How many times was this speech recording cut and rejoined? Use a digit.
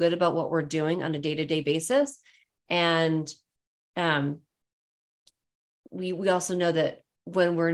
0